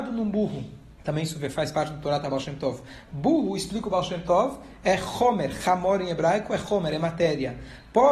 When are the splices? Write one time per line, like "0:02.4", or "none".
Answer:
0:01.0